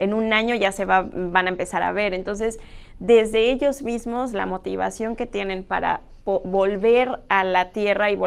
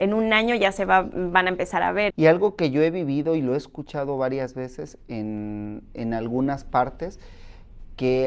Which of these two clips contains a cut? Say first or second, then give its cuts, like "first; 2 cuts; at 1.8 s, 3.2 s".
second; 1 cut; at 2.1 s